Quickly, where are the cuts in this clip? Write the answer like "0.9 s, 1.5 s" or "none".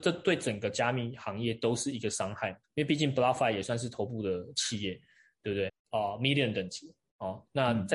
2.6 s, 5.7 s